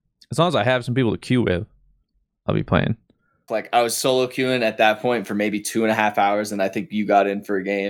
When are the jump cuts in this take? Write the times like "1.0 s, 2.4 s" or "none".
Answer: 3.5 s